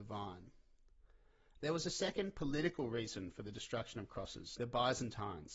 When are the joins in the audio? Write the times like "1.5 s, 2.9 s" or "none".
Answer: 4.6 s